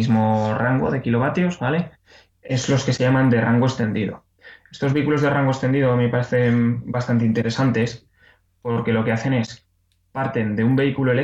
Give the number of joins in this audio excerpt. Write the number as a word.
one